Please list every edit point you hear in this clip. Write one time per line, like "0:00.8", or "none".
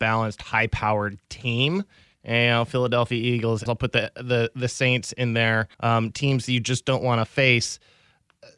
0:03.7
0:05.7